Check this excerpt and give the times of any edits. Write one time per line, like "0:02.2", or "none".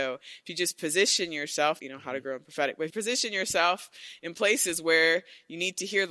0:01.8
0:02.9